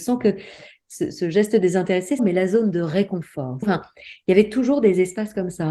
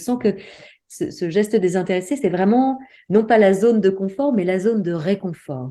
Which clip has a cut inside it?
first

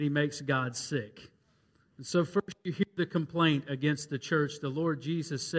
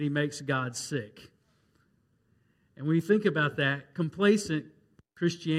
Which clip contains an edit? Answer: first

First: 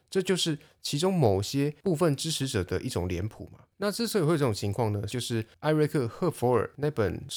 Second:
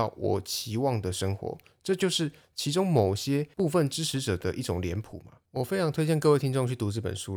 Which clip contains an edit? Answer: first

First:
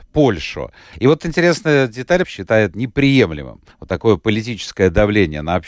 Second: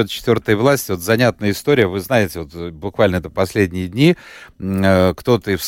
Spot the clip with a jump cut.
first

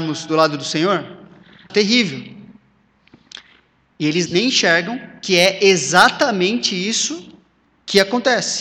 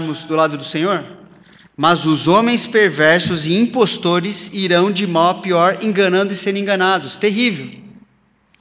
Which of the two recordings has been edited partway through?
first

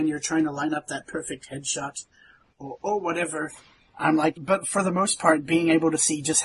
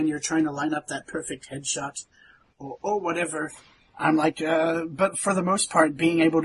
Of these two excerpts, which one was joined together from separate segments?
first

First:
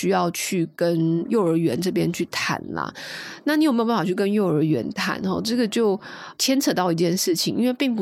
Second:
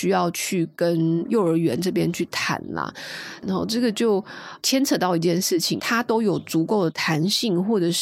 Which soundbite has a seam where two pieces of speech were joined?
second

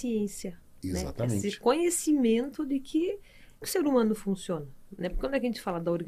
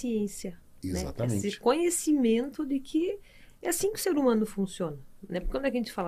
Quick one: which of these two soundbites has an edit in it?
first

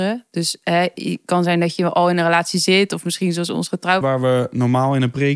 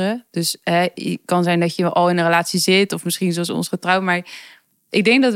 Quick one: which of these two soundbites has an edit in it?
first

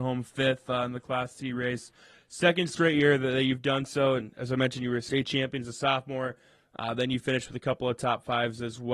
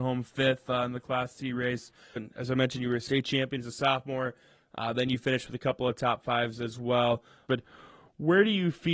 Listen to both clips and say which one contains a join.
second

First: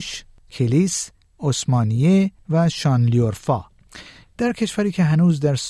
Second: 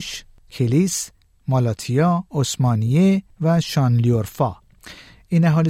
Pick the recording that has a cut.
first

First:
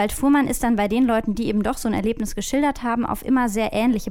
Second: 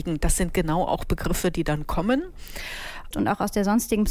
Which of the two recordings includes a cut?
second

